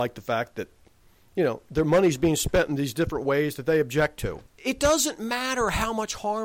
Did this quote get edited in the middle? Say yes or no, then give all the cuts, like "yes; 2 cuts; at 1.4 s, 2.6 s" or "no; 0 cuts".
yes; 1 cut; at 4.5 s